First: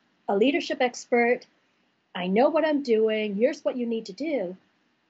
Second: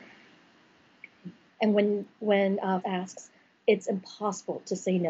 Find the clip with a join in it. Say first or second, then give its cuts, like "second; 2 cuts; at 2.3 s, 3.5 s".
second; 2 cuts; at 1.5 s, 2.8 s